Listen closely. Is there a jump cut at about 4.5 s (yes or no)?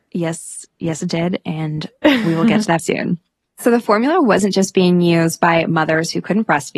no